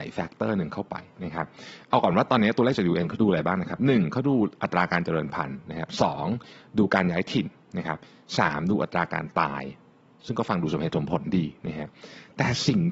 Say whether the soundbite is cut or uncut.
uncut